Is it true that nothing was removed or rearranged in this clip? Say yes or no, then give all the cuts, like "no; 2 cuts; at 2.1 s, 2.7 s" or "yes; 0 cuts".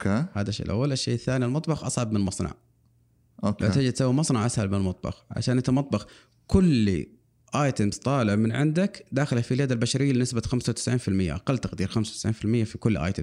yes; 0 cuts